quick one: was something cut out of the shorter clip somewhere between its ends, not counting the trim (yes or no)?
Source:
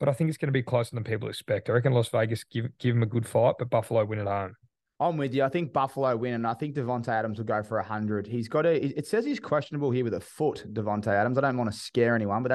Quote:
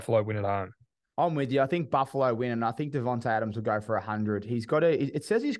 no